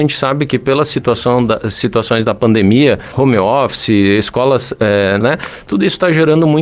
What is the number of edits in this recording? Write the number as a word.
one